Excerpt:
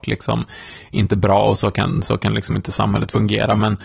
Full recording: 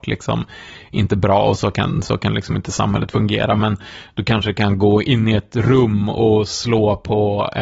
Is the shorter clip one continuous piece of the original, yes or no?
yes